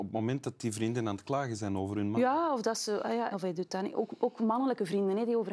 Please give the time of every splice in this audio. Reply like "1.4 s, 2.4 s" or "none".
3.3 s